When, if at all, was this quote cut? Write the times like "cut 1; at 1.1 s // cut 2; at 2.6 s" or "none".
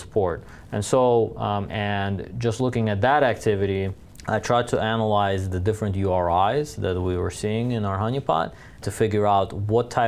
cut 1; at 1.7 s // cut 2; at 8.8 s